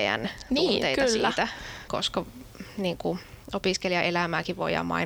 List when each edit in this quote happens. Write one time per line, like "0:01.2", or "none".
0:01.9